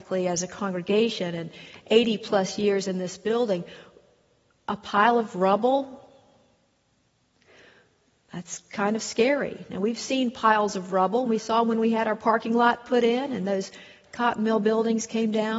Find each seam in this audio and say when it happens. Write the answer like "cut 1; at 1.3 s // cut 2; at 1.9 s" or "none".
cut 1; at 11.3 s